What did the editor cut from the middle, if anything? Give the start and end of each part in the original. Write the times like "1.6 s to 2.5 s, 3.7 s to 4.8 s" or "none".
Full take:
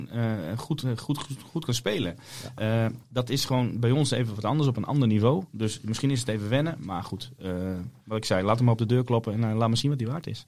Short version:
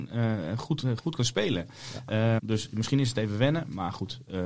1.0 s to 1.5 s, 2.9 s to 5.5 s